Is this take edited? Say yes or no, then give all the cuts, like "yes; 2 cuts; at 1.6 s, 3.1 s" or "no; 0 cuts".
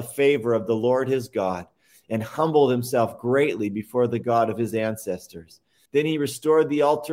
yes; 1 cut; at 5.9 s